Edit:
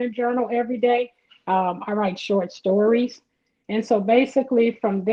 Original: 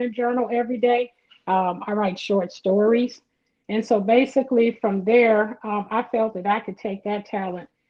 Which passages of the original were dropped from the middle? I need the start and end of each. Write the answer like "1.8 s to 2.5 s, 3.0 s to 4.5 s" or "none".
none